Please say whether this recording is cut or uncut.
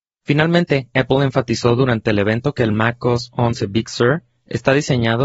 uncut